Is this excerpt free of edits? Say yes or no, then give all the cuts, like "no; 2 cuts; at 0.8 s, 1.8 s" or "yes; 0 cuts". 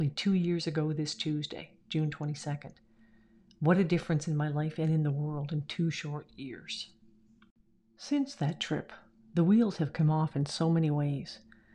yes; 0 cuts